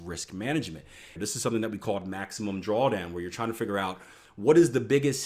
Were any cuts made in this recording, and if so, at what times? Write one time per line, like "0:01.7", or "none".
0:01.2